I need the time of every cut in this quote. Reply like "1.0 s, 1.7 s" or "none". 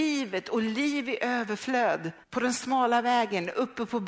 2.2 s